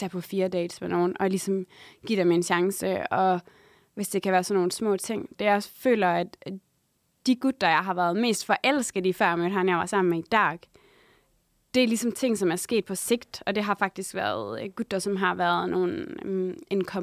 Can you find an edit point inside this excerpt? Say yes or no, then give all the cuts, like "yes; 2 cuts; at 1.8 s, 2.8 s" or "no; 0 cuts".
no; 0 cuts